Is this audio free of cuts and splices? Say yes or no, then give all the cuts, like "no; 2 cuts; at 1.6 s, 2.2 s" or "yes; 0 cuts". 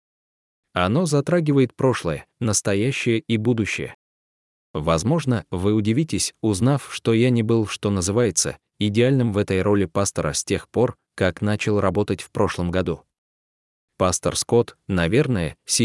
yes; 0 cuts